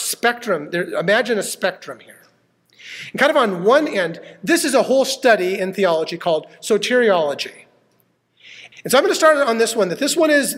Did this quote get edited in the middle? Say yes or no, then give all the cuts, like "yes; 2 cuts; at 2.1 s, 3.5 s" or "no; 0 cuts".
yes; 1 cut; at 8.7 s